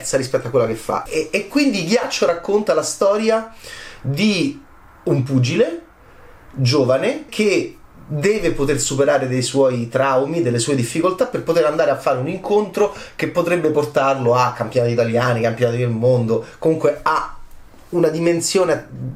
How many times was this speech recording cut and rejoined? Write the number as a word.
two